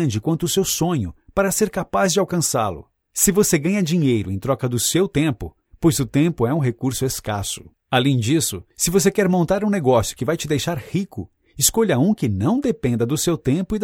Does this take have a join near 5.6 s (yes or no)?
yes